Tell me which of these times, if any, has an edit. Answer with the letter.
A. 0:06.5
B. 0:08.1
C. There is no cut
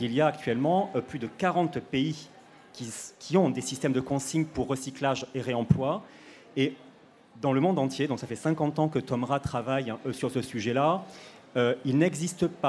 C